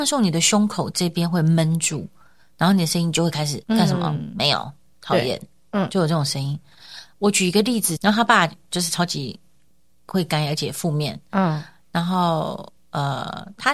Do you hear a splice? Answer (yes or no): yes